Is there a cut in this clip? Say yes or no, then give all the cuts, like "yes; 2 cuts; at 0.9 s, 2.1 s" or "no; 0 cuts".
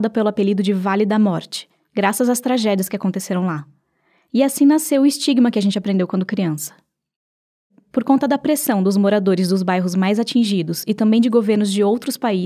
no; 0 cuts